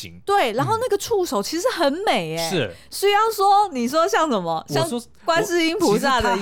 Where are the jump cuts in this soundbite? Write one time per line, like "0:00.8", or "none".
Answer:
none

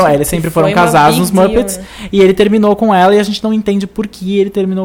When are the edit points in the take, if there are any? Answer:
none

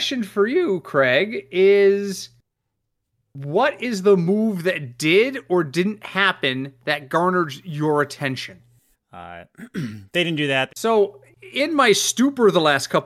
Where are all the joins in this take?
0:08.9
0:10.7

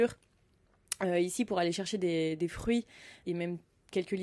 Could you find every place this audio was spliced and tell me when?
none

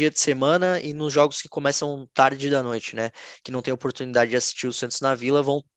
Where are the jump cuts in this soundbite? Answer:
none

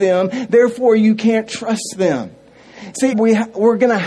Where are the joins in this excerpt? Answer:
0:03.1

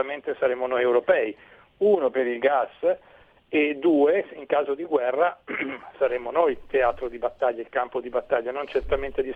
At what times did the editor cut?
none

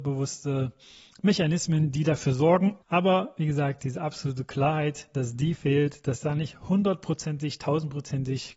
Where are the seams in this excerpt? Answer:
0:02.8

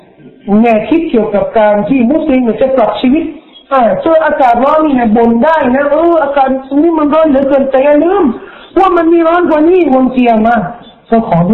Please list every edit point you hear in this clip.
none

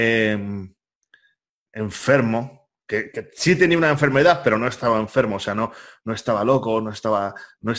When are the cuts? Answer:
none

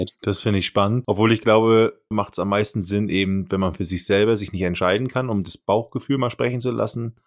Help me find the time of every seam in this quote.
0:02.1

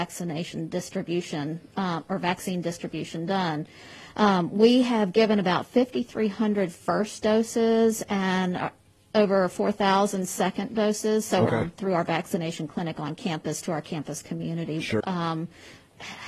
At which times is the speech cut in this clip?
0:11.5
0:15.0

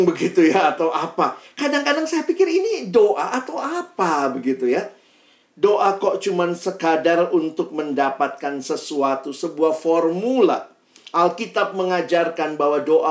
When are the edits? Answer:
none

